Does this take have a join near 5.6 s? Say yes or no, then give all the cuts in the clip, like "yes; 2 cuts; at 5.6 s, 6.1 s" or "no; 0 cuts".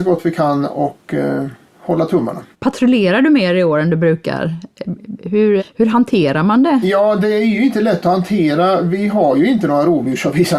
yes; 2 cuts; at 2.5 s, 5.6 s